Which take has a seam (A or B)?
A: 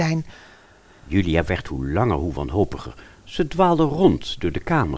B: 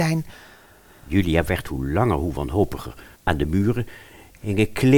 B